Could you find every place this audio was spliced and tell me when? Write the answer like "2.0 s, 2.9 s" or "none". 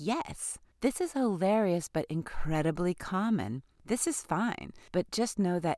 3.7 s